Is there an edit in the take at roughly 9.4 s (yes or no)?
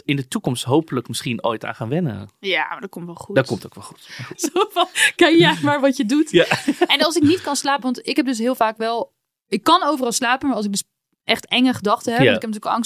no